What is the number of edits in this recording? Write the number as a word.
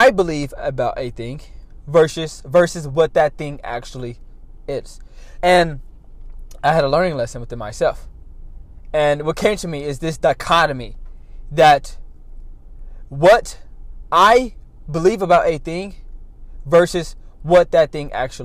one